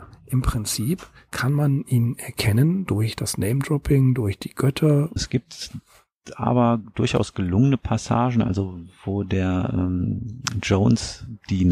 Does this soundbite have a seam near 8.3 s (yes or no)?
no